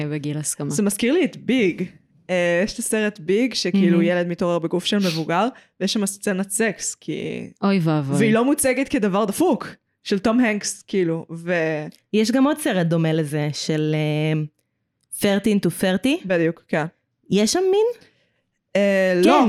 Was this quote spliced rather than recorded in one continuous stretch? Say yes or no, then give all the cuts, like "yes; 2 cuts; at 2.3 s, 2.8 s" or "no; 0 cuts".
no; 0 cuts